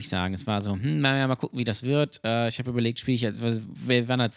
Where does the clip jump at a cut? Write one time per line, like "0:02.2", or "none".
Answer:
none